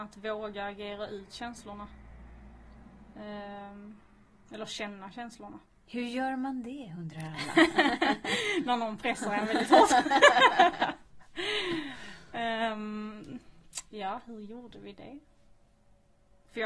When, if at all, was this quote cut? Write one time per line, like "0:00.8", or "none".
none